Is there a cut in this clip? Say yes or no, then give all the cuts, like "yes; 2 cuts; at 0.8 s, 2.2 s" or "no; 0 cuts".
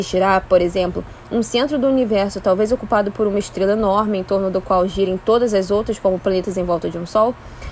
no; 0 cuts